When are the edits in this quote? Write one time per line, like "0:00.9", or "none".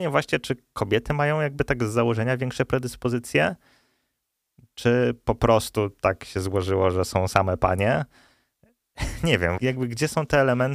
0:09.6